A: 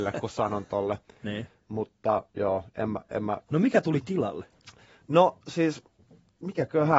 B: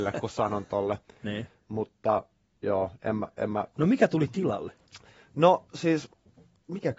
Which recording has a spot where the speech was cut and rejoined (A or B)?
A